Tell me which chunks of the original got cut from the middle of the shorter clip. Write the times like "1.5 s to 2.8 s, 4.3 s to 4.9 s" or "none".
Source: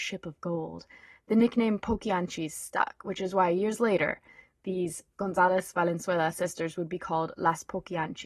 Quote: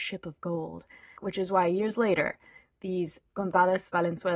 1.2 s to 3.0 s